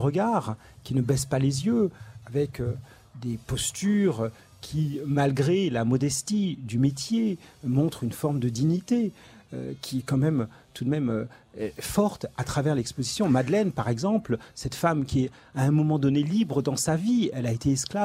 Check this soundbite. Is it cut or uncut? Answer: uncut